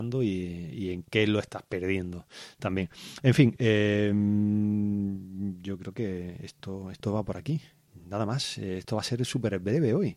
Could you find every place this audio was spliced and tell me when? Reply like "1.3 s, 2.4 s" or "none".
none

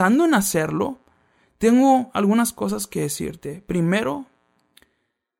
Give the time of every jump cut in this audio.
none

